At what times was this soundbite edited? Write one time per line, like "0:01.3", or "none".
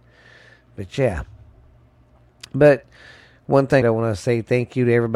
0:03.8